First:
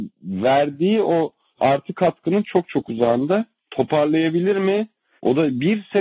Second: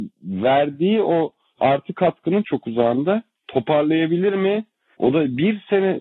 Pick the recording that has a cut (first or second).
second